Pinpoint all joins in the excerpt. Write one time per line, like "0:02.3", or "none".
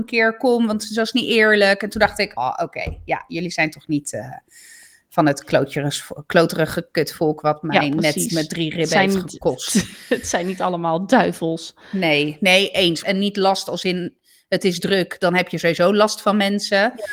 0:02.4
0:13.0